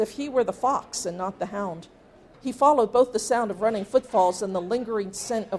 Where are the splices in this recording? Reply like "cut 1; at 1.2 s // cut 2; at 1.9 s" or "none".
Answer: cut 1; at 2.3 s